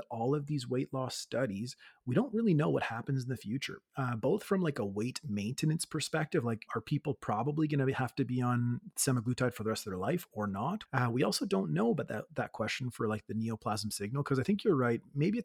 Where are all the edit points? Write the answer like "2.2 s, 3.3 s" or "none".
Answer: 6.7 s, 10.9 s

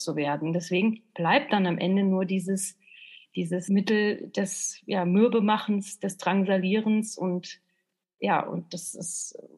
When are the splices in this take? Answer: none

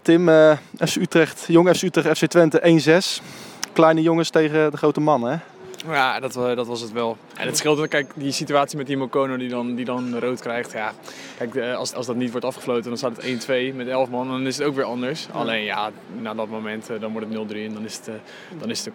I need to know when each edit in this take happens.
11.9 s, 16.2 s

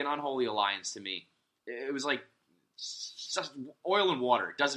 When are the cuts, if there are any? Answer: 1.6 s

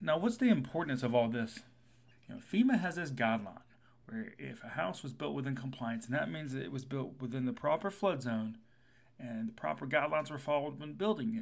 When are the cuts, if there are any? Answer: 2.1 s

